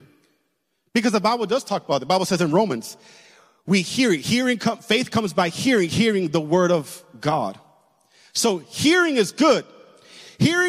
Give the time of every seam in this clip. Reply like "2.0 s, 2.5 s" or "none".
none